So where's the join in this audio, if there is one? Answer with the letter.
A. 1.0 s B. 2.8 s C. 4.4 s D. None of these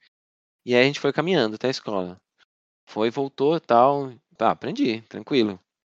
C